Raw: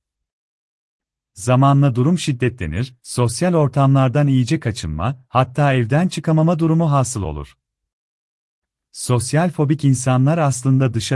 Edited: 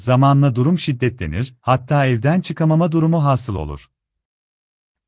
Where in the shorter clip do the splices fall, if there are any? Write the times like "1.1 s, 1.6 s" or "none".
1.6 s